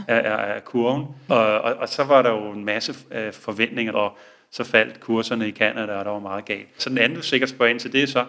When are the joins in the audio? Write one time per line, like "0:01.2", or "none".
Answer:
0:01.3
0:03.9
0:06.8

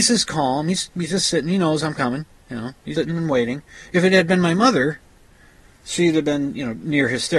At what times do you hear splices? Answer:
0:02.9

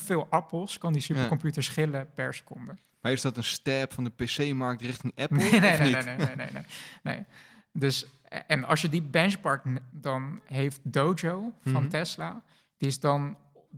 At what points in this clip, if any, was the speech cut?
0:09.9

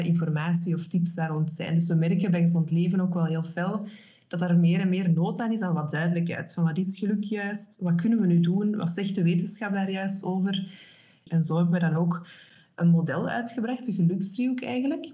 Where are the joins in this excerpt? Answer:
0:11.3

